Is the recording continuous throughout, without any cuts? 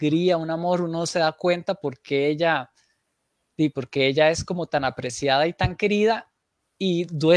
yes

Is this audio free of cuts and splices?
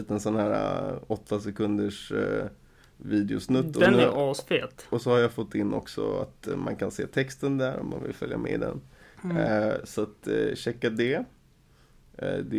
yes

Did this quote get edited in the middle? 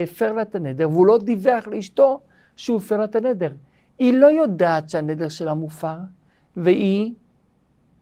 no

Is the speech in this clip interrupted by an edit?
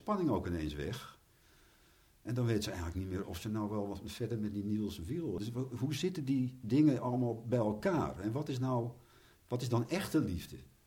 yes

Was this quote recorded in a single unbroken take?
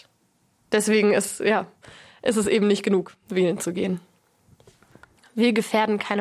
no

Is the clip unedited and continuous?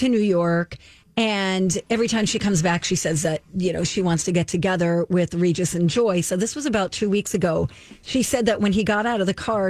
yes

